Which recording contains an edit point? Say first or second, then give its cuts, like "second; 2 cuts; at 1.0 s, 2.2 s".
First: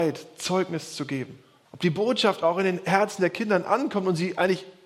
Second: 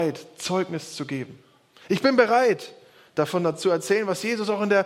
first; 1 cut; at 1.6 s